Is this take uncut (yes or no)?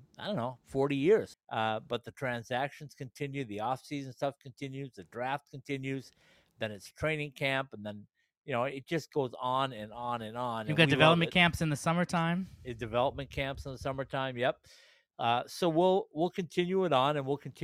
no